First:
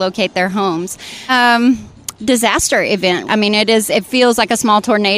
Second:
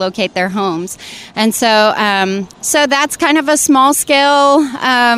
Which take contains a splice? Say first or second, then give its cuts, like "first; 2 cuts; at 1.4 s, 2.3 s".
first; 2 cuts; at 1.3 s, 3.3 s